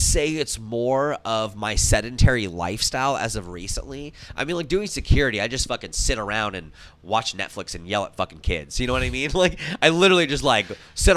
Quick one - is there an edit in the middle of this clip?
no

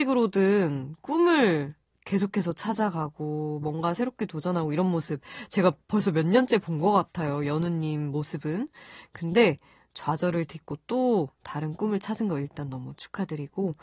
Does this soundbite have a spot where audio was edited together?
no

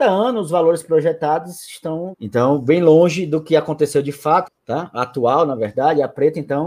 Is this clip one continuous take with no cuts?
no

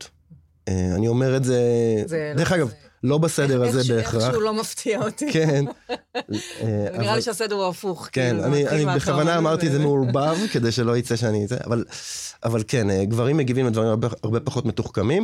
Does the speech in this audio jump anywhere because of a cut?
no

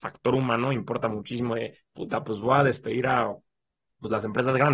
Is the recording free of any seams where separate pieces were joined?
yes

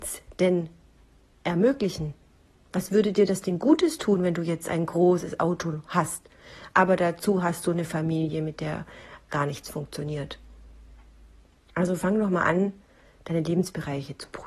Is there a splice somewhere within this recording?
no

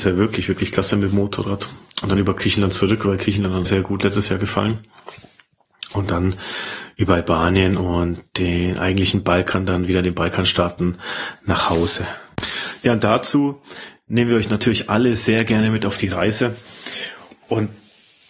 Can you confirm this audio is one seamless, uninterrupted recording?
no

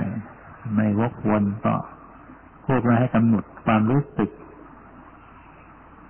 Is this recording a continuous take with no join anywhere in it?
yes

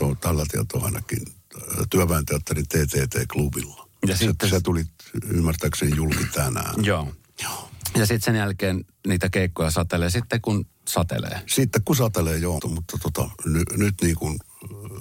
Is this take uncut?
no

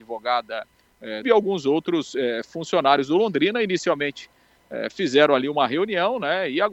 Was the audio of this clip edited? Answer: yes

